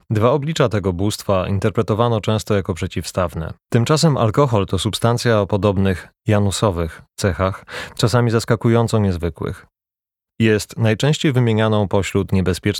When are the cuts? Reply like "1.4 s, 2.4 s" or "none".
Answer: 3.7 s